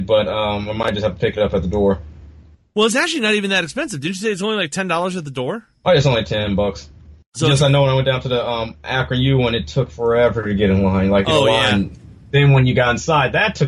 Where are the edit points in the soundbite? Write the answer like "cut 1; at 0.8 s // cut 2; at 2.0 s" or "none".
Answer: none